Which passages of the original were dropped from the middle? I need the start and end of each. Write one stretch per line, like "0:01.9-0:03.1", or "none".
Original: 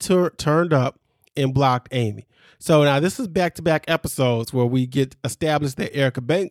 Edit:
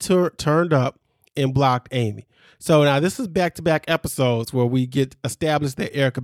none